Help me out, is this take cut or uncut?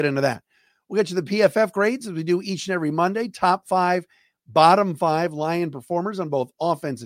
uncut